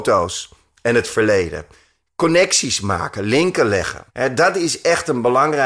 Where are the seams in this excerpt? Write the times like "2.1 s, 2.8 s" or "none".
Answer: 4.1 s